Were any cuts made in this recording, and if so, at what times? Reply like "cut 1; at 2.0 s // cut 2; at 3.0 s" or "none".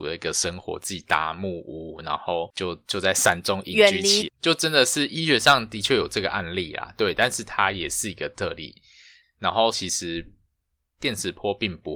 cut 1; at 4.3 s // cut 2; at 9.7 s